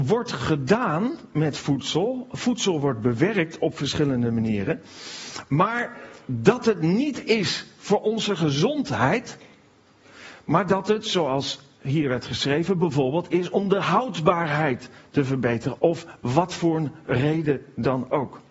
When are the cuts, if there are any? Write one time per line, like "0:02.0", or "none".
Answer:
0:15.8